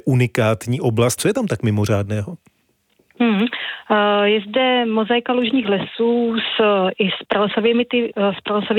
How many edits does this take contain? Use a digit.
1